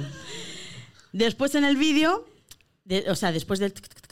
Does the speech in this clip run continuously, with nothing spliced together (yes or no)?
yes